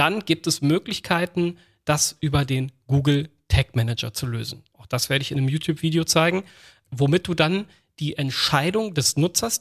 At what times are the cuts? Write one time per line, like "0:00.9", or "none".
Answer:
0:04.7
0:06.8

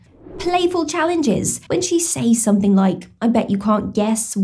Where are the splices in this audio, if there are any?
0:01.7

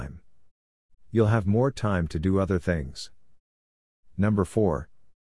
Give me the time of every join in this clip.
0:00.9

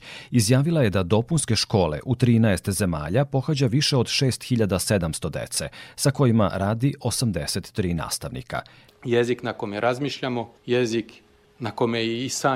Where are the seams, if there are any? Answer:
0:08.9
0:10.6

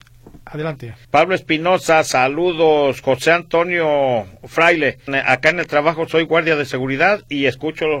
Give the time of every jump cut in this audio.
0:01.0
0:05.1

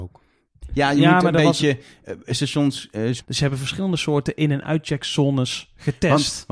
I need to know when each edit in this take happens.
0:03.2

